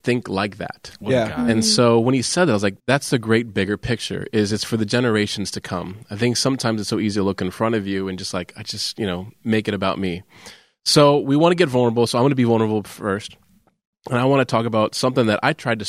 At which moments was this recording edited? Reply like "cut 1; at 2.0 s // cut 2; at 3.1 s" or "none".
cut 1; at 2.8 s